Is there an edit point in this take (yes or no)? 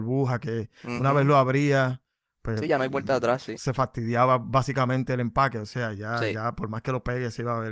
no